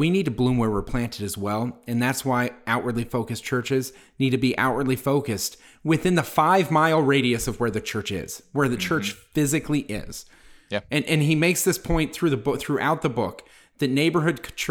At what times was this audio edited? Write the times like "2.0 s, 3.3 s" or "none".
11.1 s